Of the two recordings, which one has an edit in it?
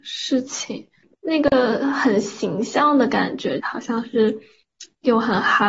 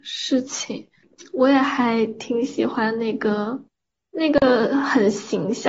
first; 2 cuts; at 1.1 s, 3.6 s

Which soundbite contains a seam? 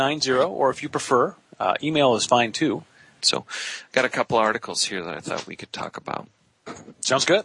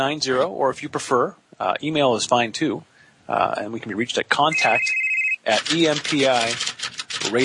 first; 1 cut; at 3.2 s

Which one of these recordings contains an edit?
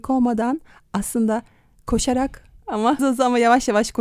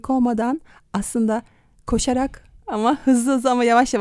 first; 1 cut; at 3.0 s

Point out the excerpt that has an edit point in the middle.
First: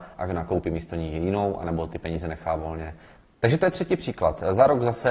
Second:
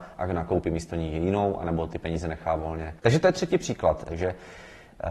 second; 2 cuts; at 3.0 s, 4.0 s

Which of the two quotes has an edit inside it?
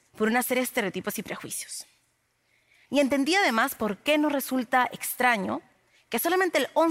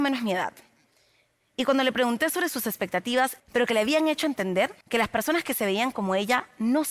second; 2 cuts; at 3.4 s, 4.8 s

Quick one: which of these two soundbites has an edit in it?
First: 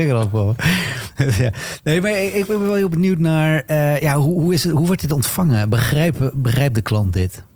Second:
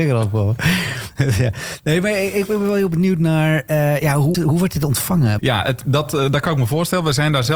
second; 2 cuts; at 4.3 s, 5.4 s

